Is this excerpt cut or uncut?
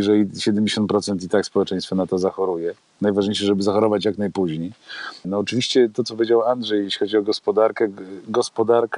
cut